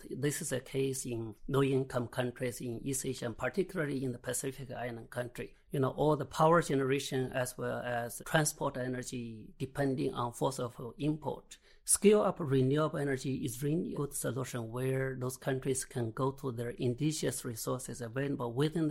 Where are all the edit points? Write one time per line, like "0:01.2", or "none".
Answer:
none